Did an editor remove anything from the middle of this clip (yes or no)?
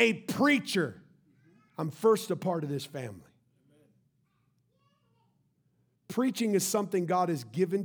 no